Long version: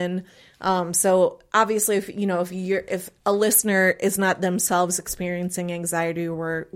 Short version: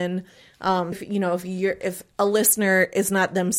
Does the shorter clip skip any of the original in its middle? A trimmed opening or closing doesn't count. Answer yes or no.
yes